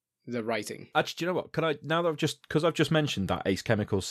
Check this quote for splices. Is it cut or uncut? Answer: cut